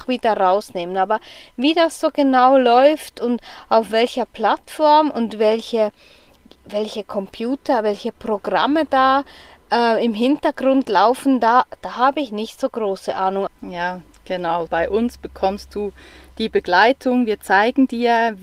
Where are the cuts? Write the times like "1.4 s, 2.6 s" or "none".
13.5 s, 14.7 s